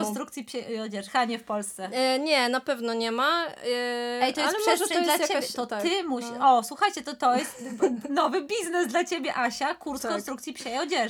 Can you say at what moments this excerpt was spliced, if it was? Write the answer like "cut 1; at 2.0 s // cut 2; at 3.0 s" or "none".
none